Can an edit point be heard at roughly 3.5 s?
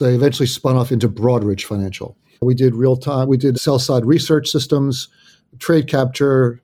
yes; 2 cuts; at 2.3 s, 3.5 s

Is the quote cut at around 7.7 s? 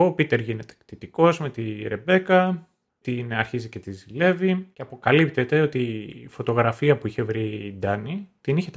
no; 2 cuts; at 3.0 s, 4.7 s

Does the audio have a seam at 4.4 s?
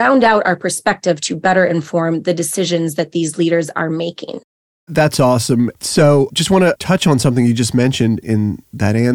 no; 1 cut; at 5.7 s

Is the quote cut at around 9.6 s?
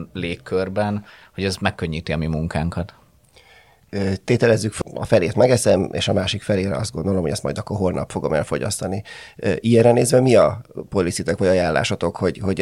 no; 1 cut; at 4.8 s

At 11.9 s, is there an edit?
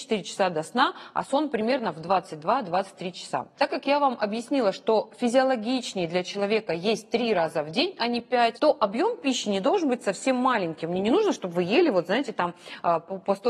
no; 2 cuts; at 3.5 s, 8.5 s

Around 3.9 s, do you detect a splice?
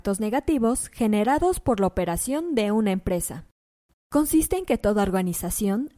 yes; 1 cut; at 3.9 s

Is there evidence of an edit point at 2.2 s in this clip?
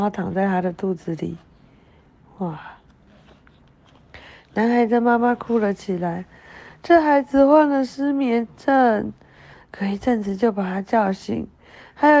no; 1 cut; at 9.5 s

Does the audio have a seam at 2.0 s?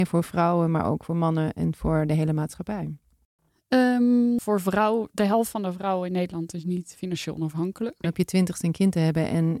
no; 2 cuts; at 4.4 s, 8.0 s

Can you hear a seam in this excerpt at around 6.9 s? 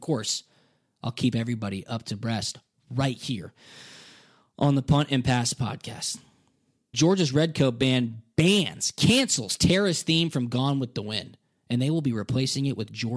yes; 1 cut; at 6.9 s

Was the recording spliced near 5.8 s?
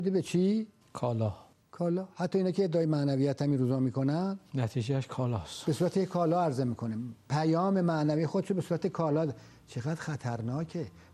no; 1 cut; at 1.6 s

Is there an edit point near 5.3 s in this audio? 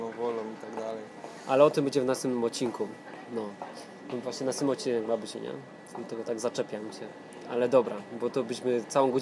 yes; 1 cut; at 5.3 s

